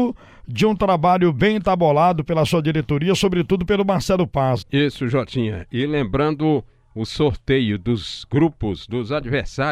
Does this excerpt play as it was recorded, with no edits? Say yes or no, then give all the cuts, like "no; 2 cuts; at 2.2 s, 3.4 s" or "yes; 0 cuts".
no; 1 cut; at 4.6 s